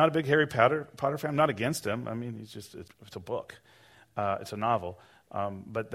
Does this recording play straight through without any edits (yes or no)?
no